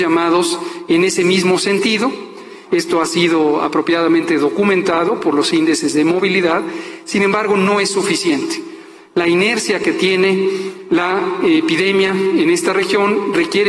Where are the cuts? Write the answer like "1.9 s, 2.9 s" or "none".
2.7 s